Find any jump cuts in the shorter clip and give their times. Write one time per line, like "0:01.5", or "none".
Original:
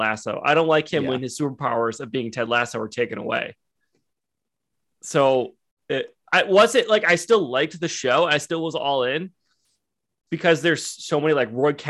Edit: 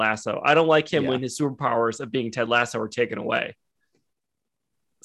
none